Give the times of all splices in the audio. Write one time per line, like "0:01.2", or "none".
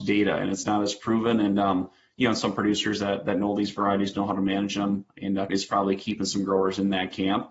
0:05.5